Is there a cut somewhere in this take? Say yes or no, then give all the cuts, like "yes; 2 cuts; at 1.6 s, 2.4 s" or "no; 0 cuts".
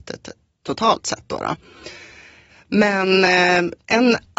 no; 0 cuts